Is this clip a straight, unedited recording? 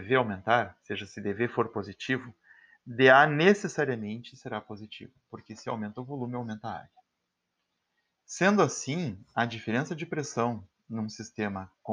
no; 1 cut; at 8.1 s

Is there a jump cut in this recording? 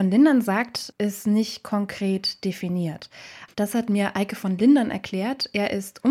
yes; 2 cuts; at 0.9 s, 3.5 s

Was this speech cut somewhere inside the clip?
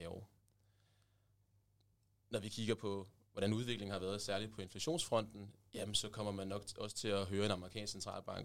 no; 0 cuts

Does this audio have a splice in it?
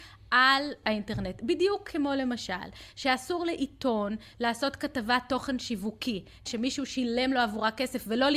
no; 0 cuts

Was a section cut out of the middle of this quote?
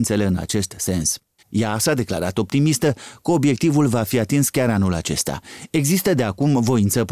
yes; 1 cut; at 1.4 s

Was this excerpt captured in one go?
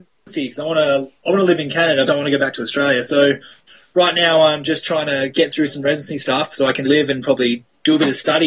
no; 2 cuts; at 2.1 s, 6.8 s

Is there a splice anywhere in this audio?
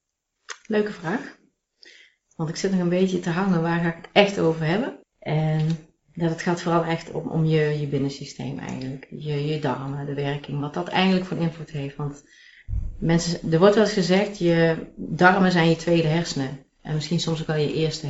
yes; 1 cut; at 5.0 s

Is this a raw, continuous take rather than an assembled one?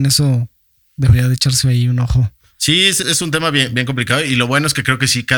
no; 1 cut; at 3.0 s

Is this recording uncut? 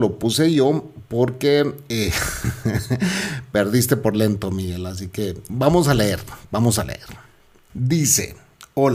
no; 1 cut; at 5.5 s

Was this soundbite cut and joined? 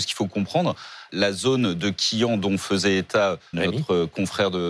yes; 2 cuts; at 1.1 s, 3.5 s

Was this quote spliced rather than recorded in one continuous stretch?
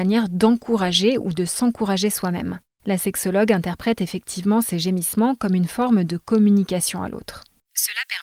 yes; 1 cut; at 2.8 s

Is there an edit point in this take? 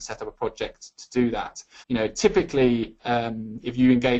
yes; 1 cut; at 1.8 s

